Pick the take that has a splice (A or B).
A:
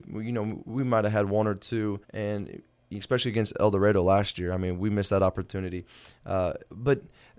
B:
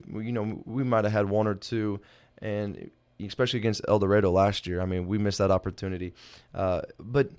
A